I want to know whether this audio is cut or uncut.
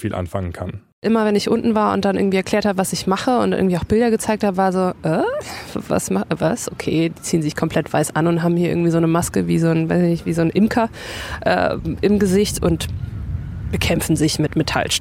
uncut